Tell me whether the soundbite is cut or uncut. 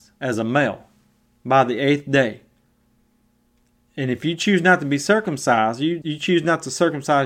cut